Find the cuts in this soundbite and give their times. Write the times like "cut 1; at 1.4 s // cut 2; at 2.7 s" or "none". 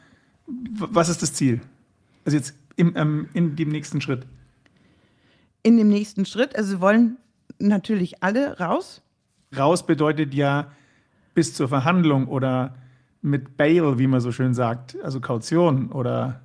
cut 1; at 9.5 s